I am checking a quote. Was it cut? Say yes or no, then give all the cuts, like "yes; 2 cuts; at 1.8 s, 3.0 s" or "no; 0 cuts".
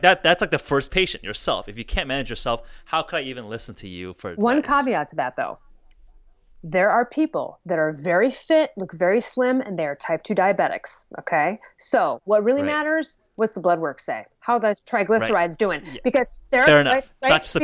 no; 0 cuts